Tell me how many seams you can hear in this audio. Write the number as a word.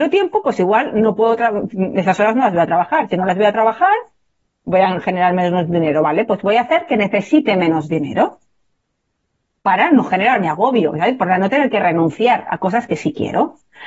zero